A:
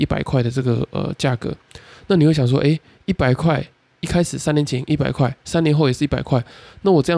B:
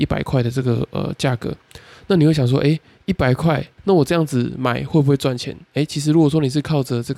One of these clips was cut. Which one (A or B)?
B